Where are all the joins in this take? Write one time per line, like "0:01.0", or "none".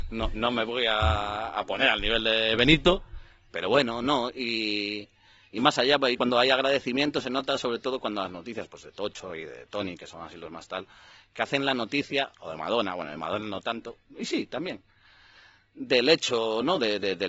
none